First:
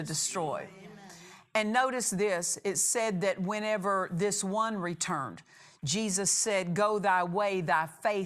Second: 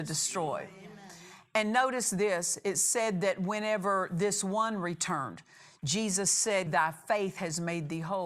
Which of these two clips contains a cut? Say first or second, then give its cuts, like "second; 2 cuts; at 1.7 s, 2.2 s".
second; 1 cut; at 6.7 s